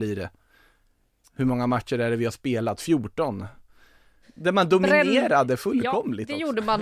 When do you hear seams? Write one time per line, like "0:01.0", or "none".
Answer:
0:04.2